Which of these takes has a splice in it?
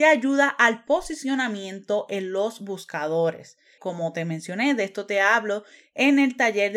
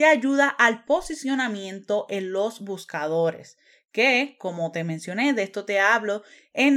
first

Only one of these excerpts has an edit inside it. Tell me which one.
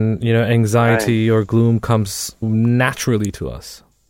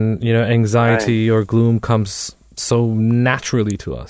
first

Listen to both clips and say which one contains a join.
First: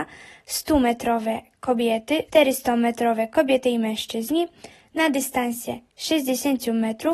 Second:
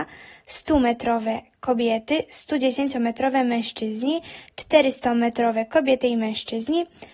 first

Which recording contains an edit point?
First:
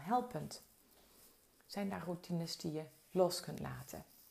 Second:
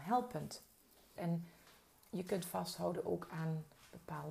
second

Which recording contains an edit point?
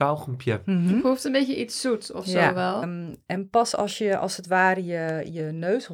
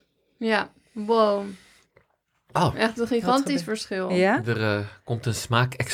first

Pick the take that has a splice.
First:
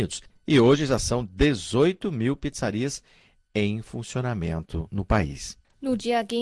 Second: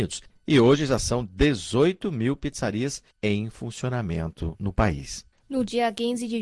second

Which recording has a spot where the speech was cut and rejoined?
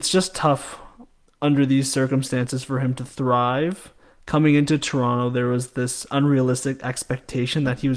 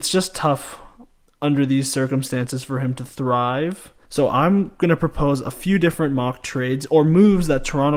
second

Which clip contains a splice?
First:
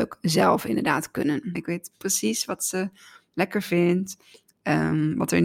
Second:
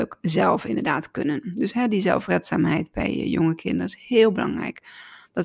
first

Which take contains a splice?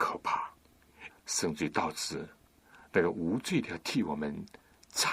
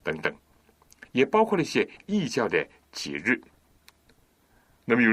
first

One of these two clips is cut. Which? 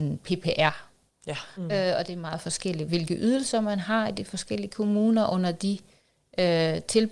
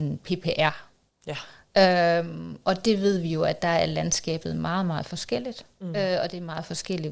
first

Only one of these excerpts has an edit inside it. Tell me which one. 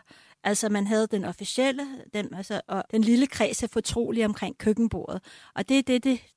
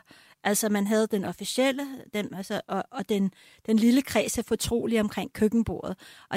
first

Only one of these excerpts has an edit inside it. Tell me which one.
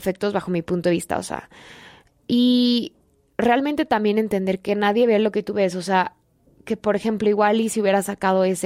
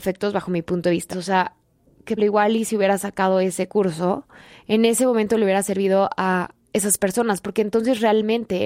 second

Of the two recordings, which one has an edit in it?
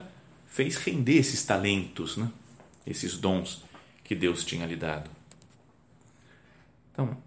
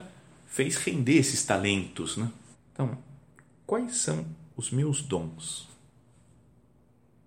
second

